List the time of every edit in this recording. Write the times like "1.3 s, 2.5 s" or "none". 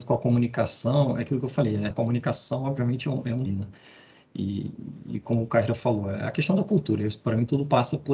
1.9 s, 3.5 s